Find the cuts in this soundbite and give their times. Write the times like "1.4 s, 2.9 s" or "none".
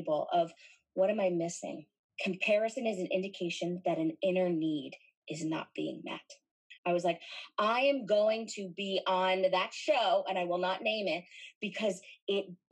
2.1 s, 6.8 s